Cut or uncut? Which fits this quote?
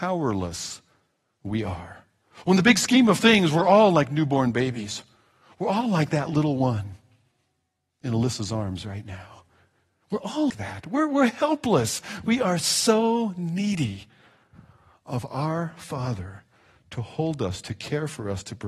cut